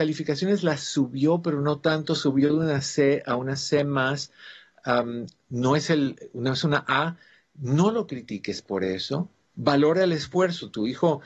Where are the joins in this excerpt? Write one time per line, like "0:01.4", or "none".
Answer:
none